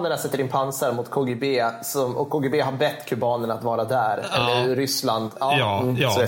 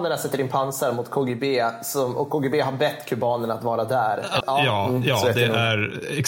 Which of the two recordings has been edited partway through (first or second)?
second